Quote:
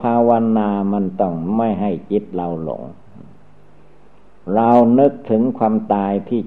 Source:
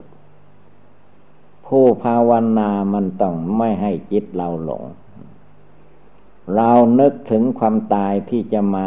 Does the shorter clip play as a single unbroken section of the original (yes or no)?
yes